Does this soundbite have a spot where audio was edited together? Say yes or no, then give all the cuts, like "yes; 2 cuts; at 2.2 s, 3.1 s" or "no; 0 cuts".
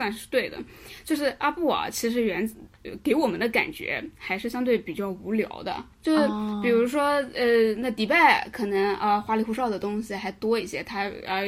yes; 1 cut; at 5.9 s